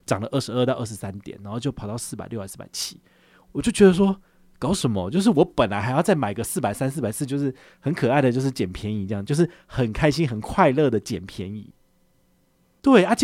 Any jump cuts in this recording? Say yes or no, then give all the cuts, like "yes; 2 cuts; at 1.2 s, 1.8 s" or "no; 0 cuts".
no; 0 cuts